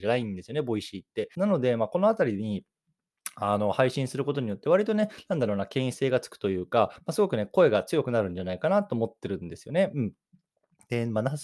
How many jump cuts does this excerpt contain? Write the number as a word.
one